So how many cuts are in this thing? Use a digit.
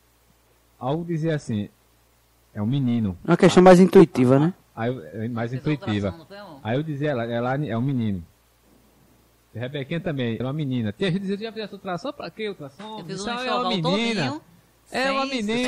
1